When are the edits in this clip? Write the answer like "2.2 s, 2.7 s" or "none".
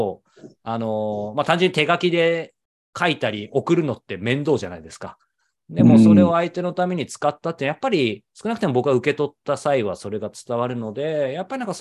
none